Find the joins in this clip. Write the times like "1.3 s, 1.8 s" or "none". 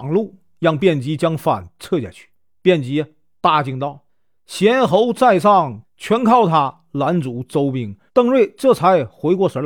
4.1 s, 5.8 s, 8.1 s